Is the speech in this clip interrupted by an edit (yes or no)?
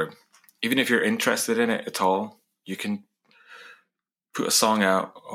no